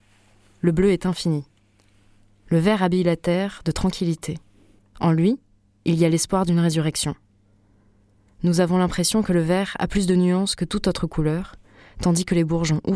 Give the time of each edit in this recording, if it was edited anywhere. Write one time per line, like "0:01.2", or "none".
0:04.8